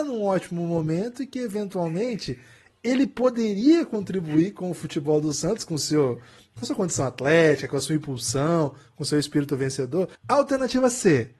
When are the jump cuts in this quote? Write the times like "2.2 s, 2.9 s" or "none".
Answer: 10.1 s